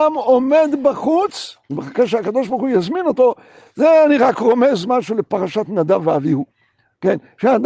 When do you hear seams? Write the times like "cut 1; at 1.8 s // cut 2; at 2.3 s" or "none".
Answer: cut 1; at 1.6 s